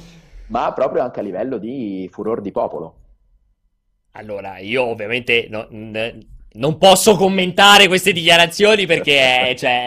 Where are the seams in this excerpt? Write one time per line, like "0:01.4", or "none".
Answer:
0:06.5